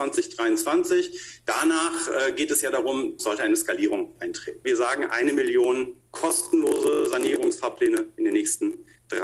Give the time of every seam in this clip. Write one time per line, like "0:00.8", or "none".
0:03.2
0:04.6